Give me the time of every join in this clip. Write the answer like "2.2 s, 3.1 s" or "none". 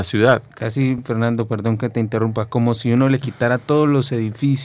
none